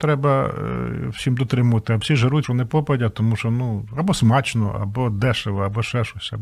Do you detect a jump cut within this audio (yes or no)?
yes